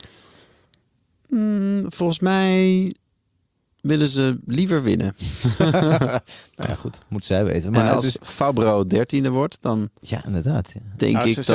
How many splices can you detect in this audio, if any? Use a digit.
0